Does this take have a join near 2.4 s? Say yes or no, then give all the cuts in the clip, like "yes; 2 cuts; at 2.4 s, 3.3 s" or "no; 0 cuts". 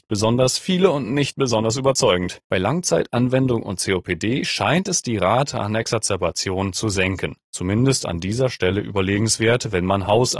yes; 2 cuts; at 2.4 s, 7.4 s